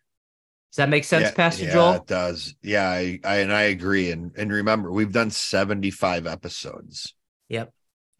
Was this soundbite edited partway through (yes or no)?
no